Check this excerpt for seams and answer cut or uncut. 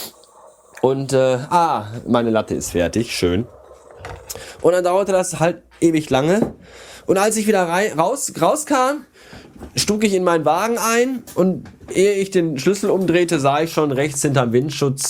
uncut